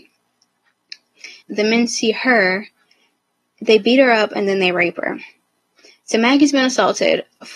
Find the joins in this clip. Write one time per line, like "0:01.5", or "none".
0:01.4

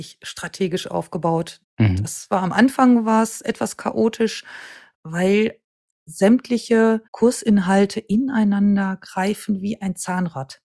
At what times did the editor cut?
0:01.6
0:07.1

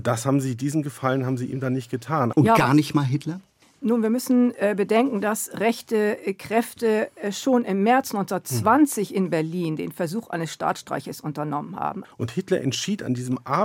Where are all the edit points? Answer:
0:02.3
0:12.0

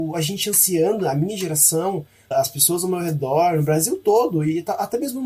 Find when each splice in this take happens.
0:02.3

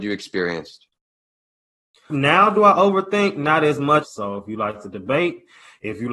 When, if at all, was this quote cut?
0:02.1
0:04.0

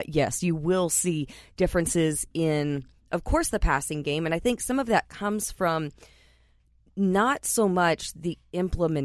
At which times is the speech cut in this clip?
none

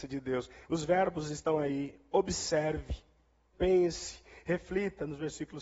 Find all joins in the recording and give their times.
0:03.5

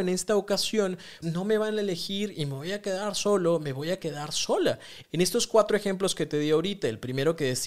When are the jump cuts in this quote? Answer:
0:01.2
0:05.0

